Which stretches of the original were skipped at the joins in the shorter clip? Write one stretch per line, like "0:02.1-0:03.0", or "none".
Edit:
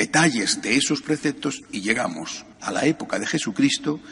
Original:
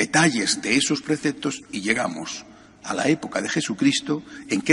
0:02.5-0:02.7